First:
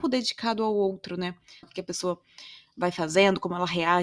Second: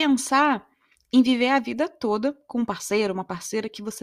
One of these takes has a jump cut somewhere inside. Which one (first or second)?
first